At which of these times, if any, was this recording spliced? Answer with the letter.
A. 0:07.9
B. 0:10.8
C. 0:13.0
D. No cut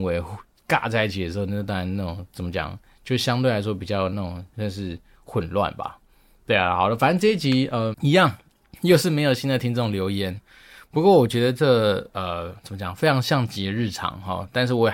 A